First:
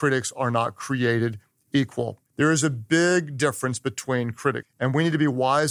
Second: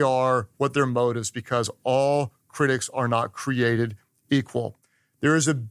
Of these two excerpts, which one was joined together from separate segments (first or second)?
first